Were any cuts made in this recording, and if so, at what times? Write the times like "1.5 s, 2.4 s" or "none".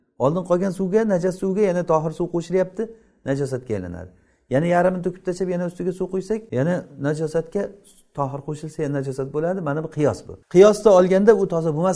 6.5 s, 10.4 s